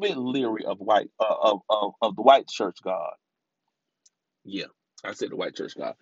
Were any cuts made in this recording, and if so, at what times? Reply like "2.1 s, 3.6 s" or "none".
none